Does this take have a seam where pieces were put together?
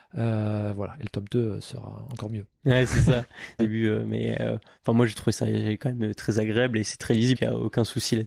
yes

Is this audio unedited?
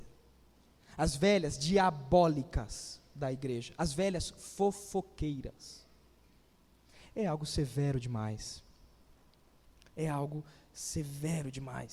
yes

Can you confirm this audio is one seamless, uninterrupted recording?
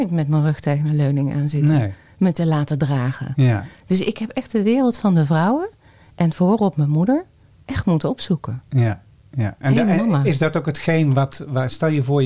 yes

